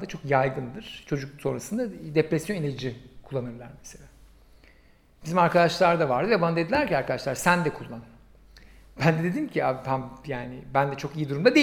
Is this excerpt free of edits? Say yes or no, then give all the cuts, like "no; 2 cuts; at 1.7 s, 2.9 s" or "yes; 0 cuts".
yes; 0 cuts